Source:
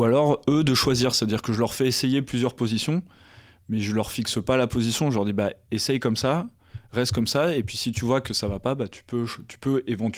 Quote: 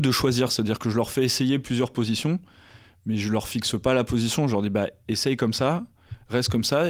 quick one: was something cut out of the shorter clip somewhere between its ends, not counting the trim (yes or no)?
no